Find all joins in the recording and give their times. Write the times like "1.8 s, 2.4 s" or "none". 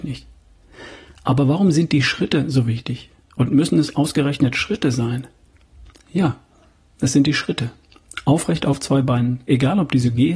9.4 s

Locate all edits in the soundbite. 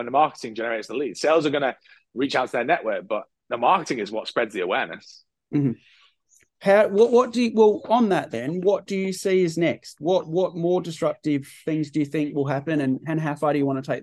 3.3 s

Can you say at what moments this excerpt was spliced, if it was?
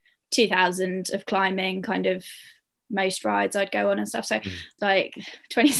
4.8 s

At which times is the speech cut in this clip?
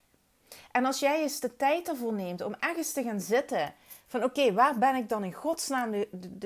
none

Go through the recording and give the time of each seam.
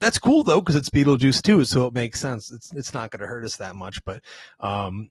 2.7 s

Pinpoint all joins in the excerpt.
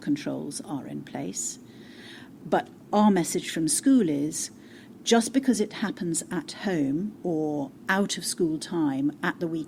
2.4 s

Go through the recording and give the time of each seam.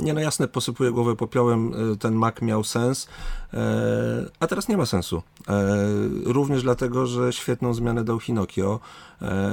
none

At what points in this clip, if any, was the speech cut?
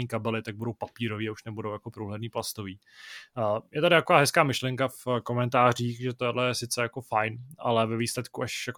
none

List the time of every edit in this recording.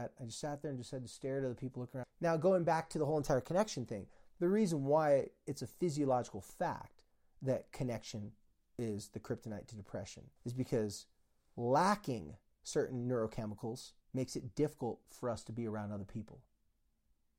2.0 s, 10.4 s, 14.0 s

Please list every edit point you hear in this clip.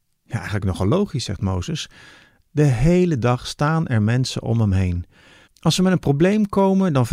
2.4 s, 5.5 s

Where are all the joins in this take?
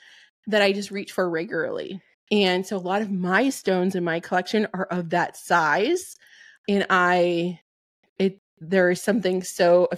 2.1 s

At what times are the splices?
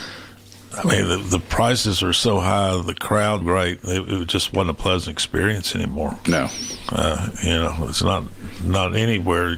3.4 s

